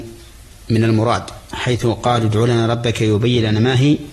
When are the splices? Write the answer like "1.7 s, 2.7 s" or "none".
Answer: 1.4 s